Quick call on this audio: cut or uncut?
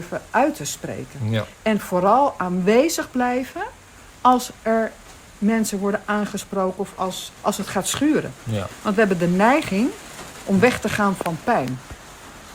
uncut